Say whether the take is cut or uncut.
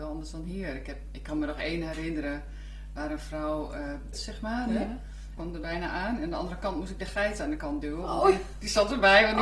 cut